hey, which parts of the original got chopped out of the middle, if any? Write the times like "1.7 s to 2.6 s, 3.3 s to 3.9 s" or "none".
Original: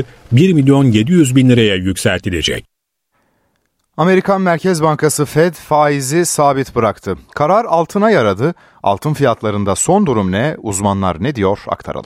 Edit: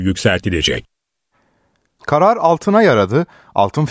3.8 s to 7.3 s